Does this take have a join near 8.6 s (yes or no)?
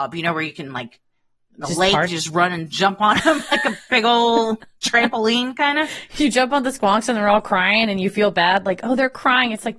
no